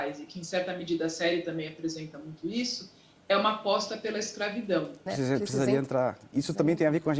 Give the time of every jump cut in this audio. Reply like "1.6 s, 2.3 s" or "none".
5.1 s

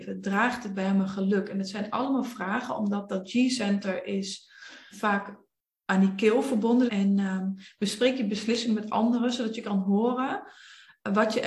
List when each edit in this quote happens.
4.9 s, 6.9 s

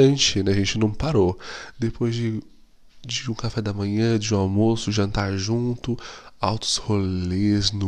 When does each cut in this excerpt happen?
none

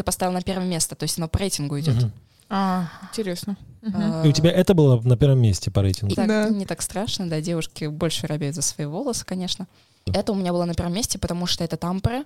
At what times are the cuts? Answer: 6.1 s, 10.1 s

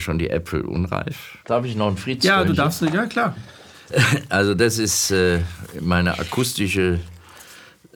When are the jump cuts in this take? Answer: 1.4 s

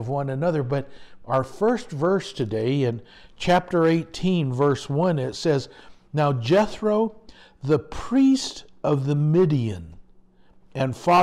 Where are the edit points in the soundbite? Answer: none

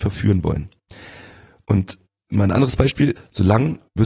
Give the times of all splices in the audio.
3.2 s

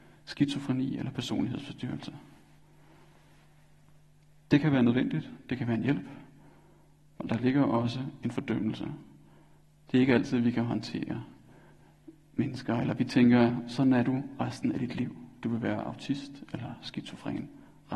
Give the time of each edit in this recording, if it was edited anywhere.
none

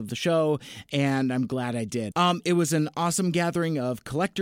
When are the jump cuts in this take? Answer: 2.1 s

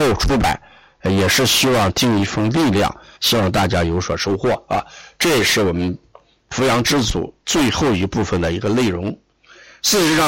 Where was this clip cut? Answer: 3.1 s

